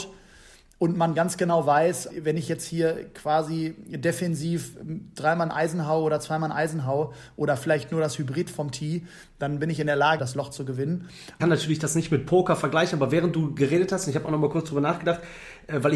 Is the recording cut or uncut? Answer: cut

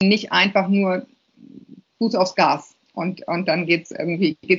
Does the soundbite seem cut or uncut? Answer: uncut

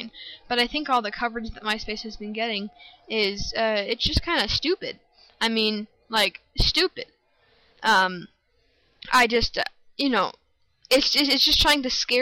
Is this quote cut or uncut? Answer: uncut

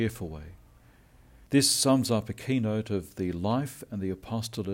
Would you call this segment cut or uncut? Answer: cut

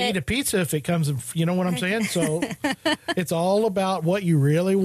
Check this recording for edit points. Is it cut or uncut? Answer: uncut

